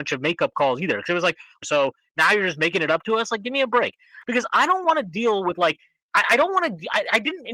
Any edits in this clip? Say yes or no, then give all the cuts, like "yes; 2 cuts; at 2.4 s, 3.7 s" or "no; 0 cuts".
yes; 2 cuts; at 1.6 s, 4.2 s